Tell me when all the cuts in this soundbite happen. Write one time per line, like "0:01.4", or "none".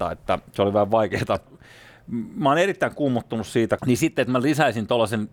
0:01.5
0:03.8